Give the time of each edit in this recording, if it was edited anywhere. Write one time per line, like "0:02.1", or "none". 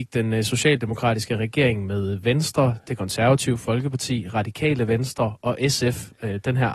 none

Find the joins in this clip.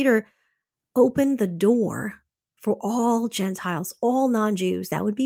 none

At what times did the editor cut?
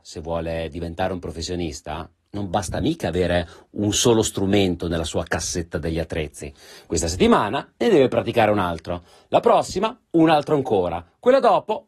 none

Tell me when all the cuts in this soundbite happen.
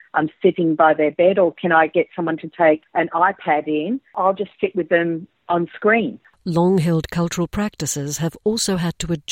none

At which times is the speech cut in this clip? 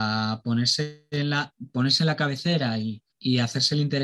0:03.1

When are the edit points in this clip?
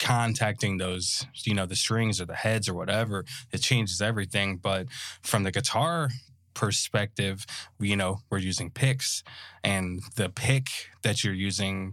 none

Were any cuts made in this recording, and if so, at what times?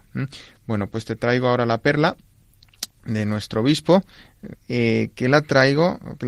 0:04.5

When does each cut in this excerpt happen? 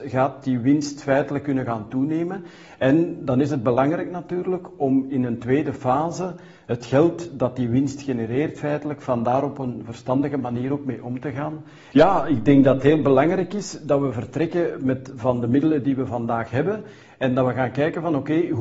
0:11.9

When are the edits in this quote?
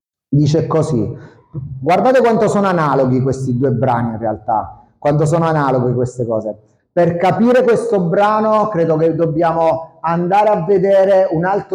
0:06.8

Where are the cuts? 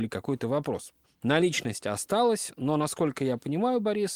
0:01.0

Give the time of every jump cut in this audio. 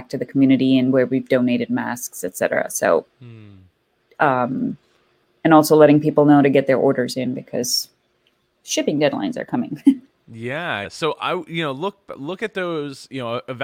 0:10.8

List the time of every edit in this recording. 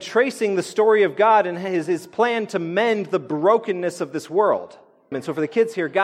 0:05.1

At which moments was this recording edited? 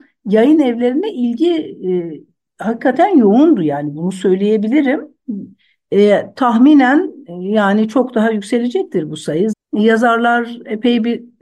0:05.9
0:09.5

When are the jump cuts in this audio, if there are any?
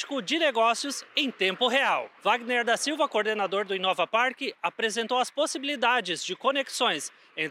0:02.2

